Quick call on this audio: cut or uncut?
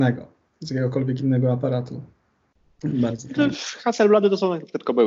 uncut